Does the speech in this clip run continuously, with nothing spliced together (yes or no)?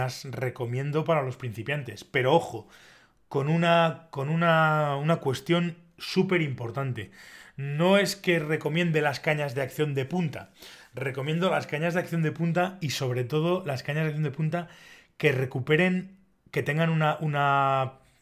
yes